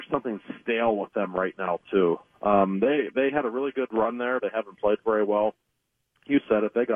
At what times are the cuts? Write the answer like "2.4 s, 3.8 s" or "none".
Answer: 4.4 s